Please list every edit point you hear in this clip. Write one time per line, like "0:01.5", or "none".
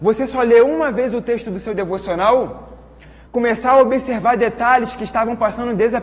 0:03.3